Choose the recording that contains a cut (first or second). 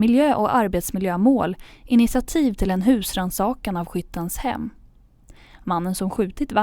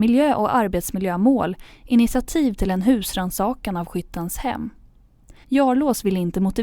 second